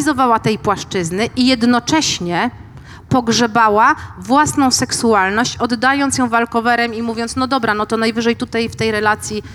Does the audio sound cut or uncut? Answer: uncut